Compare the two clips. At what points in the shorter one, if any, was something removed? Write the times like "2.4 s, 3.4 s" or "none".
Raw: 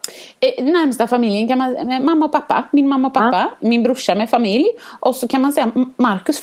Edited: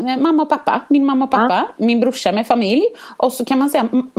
none